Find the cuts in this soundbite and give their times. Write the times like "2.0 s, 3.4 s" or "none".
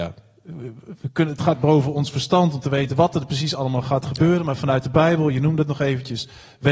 none